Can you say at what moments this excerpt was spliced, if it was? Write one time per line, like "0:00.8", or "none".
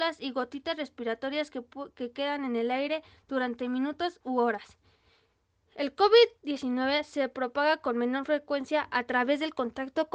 none